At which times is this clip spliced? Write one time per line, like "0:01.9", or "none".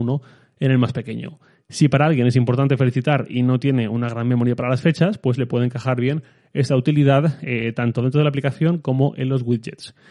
none

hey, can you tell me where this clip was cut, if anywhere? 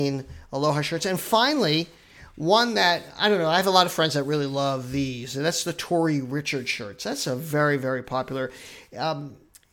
none

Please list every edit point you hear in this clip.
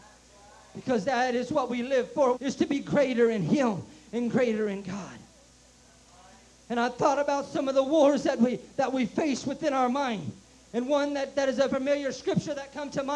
0:02.3
0:11.7

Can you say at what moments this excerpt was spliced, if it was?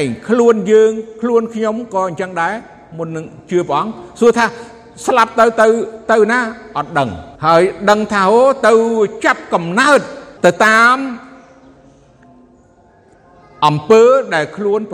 0:07.4
0:10.4

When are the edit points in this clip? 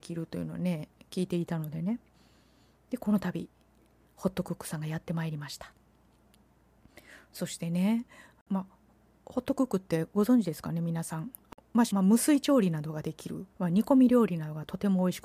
0:11.9
0:13.5

